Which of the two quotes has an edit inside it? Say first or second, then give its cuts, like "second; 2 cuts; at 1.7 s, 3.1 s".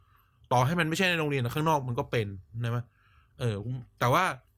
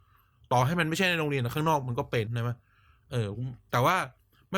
second; 1 cut; at 2.3 s